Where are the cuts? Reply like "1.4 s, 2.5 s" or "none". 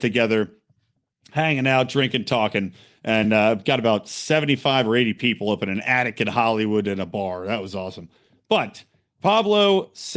none